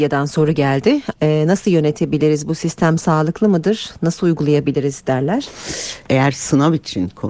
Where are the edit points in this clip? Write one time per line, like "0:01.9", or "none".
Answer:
0:01.1
0:06.1